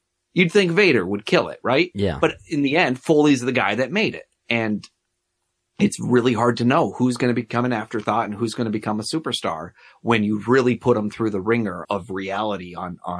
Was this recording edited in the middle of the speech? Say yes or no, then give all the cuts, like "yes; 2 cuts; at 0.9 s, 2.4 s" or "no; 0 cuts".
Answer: yes; 2 cuts; at 4.4 s, 11.8 s